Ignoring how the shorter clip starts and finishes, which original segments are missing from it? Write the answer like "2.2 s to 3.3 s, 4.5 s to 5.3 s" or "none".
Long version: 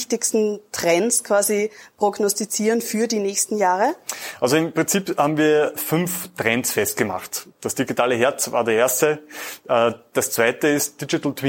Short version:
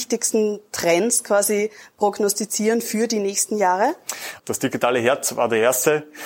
4.4 s to 7.5 s